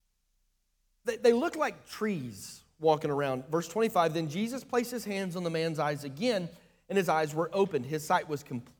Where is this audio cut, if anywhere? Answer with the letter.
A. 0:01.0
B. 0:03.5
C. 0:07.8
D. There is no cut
D